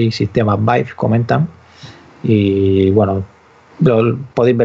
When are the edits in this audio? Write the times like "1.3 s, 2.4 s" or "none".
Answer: 2.0 s